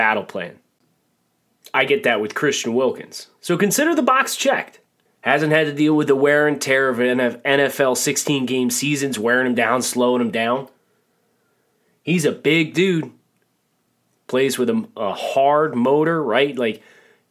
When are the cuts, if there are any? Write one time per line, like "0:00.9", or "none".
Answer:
0:05.1